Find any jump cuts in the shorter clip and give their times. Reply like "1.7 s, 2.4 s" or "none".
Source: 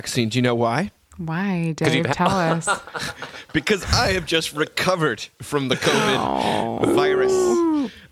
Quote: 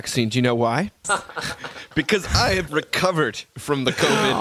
1.0 s, 2.7 s